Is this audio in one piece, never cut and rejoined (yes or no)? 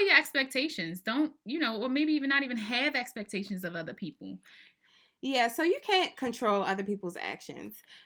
yes